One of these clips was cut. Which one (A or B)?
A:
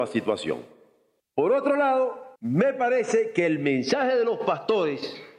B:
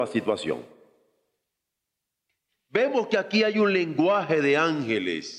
A